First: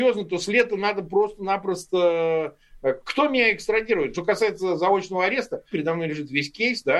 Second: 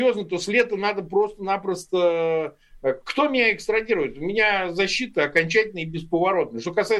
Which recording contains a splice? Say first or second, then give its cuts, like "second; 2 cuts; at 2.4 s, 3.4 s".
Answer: first; 2 cuts; at 4.1 s, 5.7 s